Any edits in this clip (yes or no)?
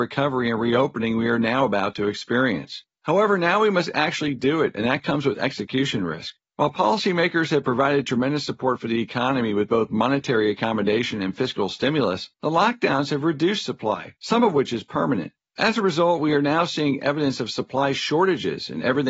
no